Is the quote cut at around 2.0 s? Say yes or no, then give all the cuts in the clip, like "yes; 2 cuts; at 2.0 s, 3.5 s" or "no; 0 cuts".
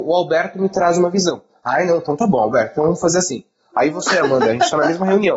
no; 0 cuts